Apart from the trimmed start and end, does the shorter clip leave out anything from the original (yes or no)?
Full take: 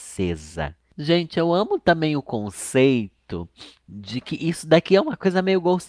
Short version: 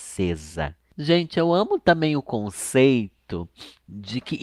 no